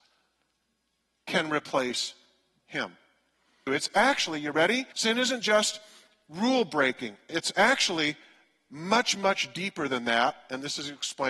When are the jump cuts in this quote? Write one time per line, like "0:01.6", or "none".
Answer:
0:03.7
0:04.9